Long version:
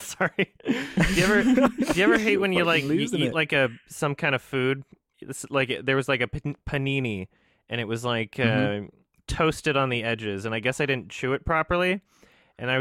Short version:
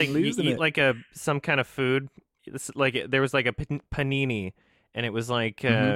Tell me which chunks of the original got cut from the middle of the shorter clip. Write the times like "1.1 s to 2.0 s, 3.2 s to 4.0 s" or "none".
none